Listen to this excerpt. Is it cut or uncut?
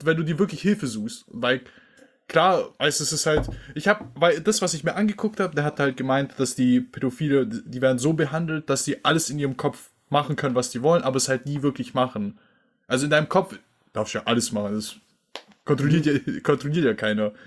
uncut